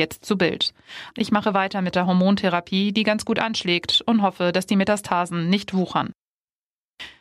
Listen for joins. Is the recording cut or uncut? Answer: cut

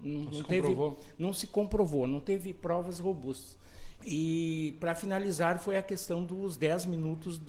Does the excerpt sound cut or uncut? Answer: cut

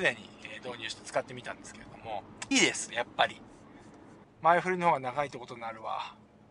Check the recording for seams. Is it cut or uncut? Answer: cut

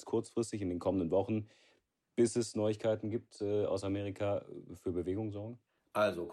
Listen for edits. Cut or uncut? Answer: uncut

